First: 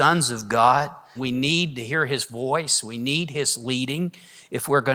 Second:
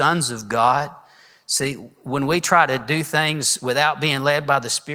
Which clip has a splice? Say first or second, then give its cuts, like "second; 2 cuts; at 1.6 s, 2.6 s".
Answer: first; 1 cut; at 1.2 s